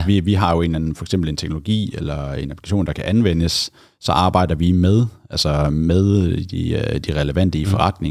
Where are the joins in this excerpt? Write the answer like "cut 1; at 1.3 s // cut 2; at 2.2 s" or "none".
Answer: none